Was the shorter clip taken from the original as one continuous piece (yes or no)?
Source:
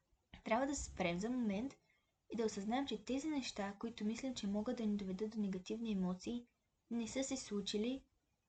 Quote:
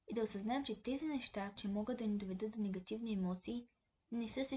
no